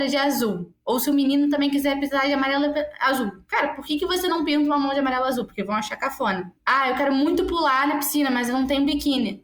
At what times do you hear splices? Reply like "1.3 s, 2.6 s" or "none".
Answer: 6.6 s